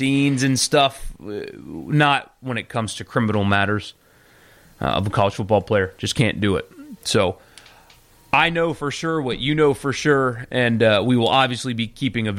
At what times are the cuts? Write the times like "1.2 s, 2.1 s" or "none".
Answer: none